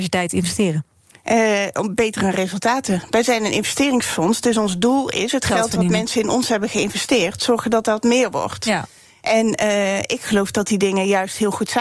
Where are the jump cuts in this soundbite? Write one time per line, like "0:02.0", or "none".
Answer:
none